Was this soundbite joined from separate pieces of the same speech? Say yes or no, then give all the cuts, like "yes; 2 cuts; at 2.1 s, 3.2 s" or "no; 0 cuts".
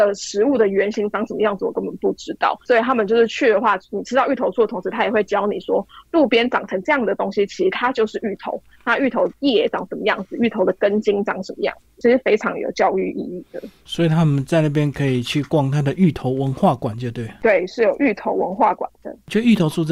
no; 0 cuts